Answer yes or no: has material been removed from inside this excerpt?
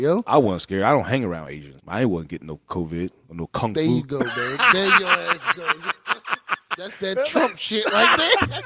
yes